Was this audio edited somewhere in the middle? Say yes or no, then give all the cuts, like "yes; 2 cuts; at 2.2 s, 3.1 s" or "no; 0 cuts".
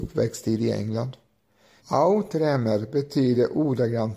yes; 1 cut; at 1.8 s